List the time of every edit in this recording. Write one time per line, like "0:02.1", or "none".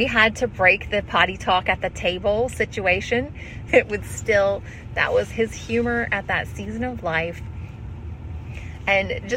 0:03.7